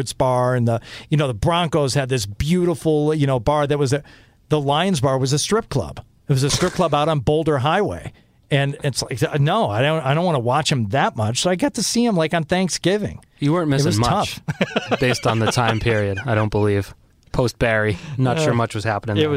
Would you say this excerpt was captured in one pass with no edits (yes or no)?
yes